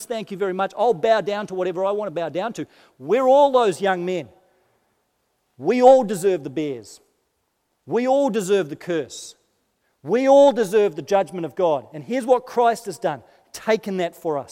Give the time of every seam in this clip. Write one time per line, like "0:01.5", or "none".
none